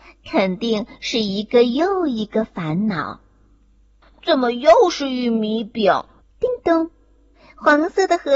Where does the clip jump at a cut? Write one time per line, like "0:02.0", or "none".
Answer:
0:04.0
0:06.2